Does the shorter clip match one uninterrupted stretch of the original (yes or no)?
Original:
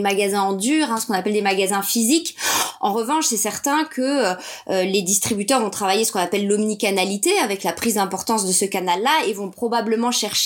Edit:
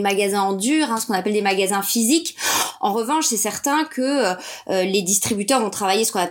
yes